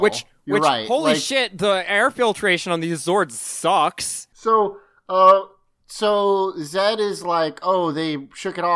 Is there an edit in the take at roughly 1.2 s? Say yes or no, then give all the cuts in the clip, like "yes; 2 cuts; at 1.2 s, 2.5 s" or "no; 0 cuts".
no; 1 cut; at 4.3 s